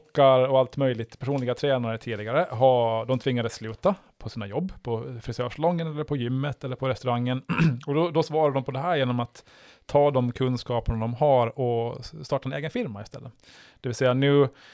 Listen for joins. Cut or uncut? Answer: uncut